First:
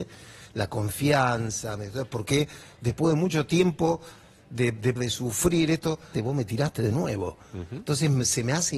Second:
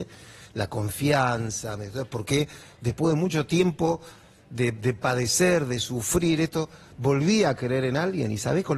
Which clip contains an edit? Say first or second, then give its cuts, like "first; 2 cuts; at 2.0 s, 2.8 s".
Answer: first; 2 cuts; at 5.0 s, 6.1 s